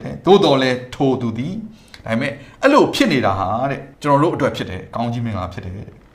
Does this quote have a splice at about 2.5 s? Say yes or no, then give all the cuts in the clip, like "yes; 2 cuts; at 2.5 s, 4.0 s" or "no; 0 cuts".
no; 1 cut; at 3.9 s